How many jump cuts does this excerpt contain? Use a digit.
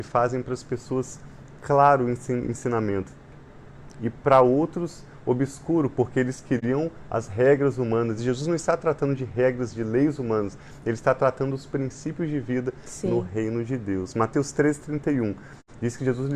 0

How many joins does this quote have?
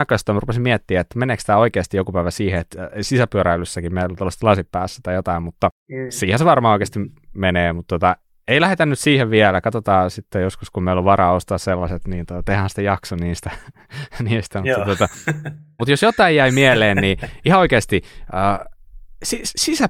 1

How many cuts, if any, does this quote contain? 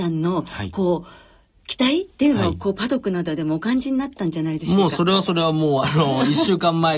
0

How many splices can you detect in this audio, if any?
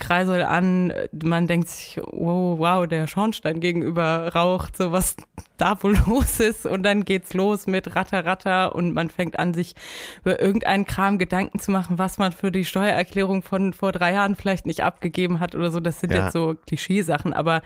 0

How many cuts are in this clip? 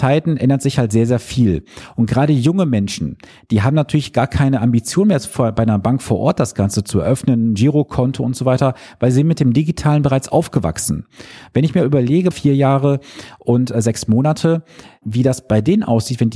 2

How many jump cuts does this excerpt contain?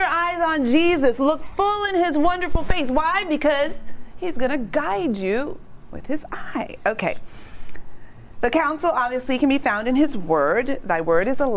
0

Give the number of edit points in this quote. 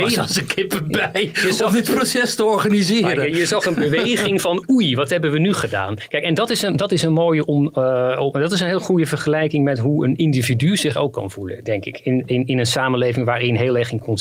0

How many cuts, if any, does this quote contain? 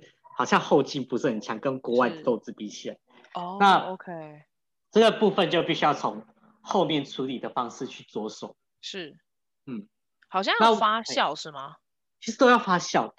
0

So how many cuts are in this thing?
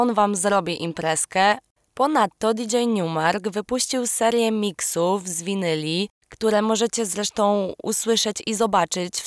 0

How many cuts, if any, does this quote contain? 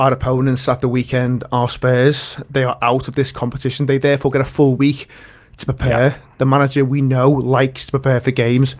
0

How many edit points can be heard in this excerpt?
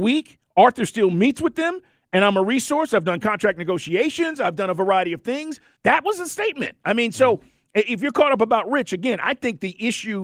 1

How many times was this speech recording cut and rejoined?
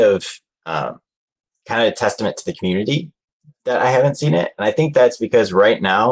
0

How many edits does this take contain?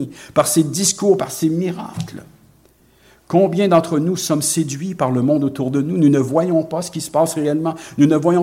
0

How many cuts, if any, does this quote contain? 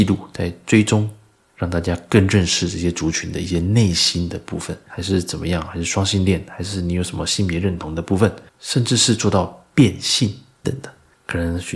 3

